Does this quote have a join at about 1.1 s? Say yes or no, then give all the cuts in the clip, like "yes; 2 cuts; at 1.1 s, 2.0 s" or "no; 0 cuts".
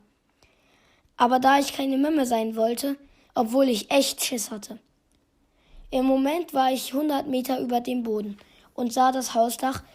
no; 1 cut; at 3.3 s